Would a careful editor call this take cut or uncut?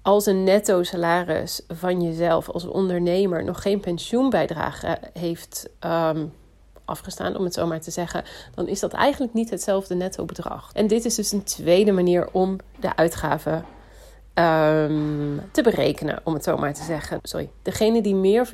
cut